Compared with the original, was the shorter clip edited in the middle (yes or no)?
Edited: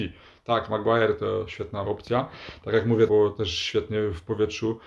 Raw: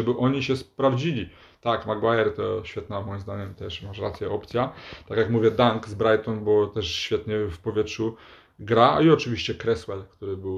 yes